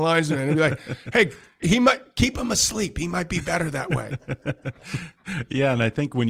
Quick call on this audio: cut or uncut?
uncut